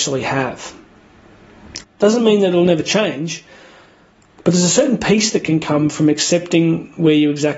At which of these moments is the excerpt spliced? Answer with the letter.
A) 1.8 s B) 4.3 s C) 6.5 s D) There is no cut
A